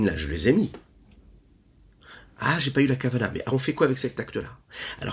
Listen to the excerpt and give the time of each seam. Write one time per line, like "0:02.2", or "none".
none